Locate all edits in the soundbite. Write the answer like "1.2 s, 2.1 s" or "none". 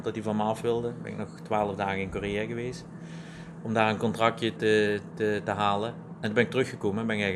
4.6 s